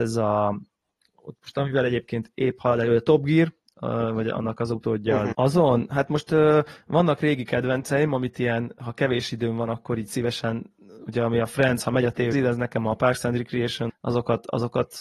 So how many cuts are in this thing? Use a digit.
3